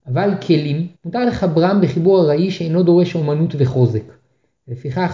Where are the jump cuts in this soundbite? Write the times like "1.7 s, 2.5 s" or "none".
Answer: 0.9 s